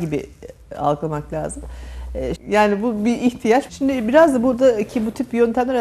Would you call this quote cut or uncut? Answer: cut